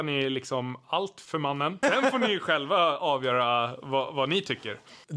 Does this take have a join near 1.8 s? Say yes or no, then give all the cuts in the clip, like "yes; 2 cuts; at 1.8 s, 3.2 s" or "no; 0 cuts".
yes; 1 cut; at 1.8 s